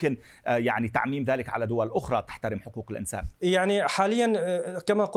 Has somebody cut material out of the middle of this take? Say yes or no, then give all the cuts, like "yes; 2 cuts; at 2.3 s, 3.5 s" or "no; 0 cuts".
yes; 1 cut; at 3.4 s